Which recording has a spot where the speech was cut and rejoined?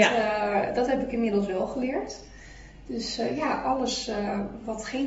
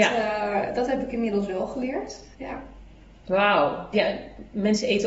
second; 2 cuts; at 2.3 s, 3.9 s

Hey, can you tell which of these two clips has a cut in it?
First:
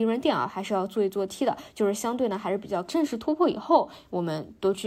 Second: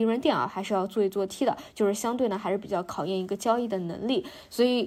first; 1 cut; at 2.9 s

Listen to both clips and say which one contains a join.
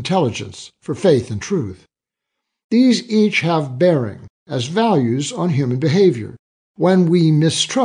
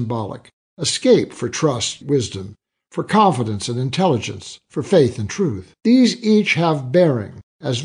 second; 2 cuts; at 2.0 s, 5.8 s

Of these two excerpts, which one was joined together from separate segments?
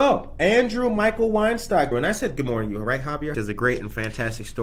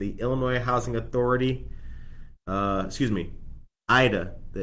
first; 2 cuts; at 1.9 s, 3.3 s

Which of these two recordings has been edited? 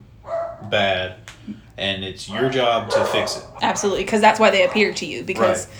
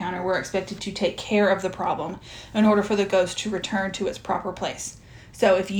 first; 1 cut; at 3.6 s

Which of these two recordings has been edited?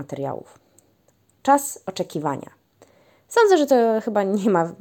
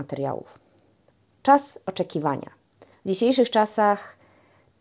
second; 1 cut; at 2.9 s

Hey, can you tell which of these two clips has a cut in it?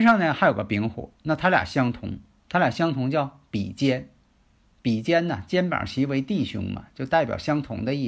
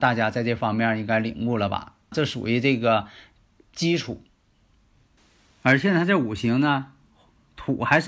second; 1 cut; at 2.1 s

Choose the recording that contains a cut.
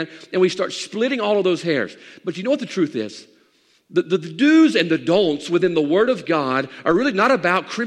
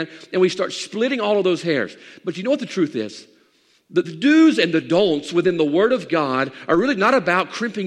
second; 1 cut; at 4.0 s

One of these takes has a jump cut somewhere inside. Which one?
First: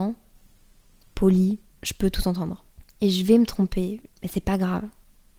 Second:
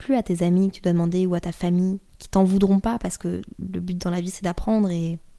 first; 1 cut; at 4.1 s

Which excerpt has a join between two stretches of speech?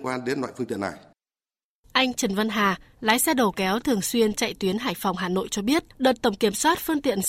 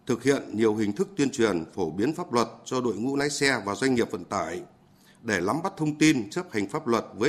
first; 1 cut; at 5.9 s

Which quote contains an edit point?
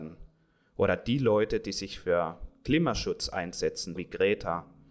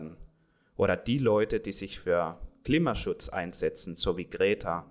first; 1 cut; at 4.0 s

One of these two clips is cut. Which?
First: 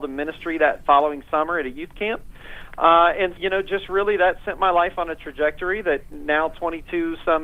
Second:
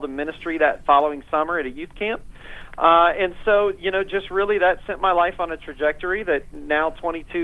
first; 1 cut; at 3.4 s

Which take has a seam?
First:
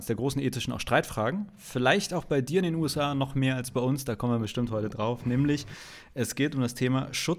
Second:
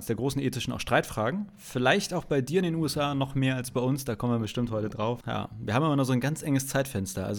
second; 1 cut; at 5.2 s

